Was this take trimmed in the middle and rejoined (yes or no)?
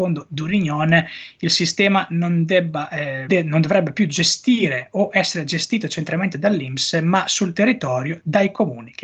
yes